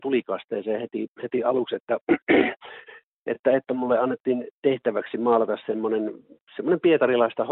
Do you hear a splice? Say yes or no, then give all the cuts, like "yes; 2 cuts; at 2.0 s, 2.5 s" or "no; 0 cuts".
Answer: no; 0 cuts